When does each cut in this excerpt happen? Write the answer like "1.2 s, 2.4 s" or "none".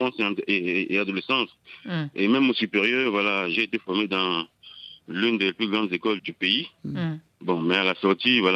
6.2 s